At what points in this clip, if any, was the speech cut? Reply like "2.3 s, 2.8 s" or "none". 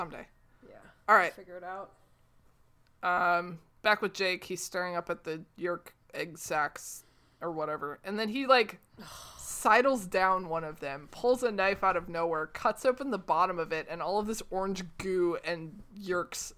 none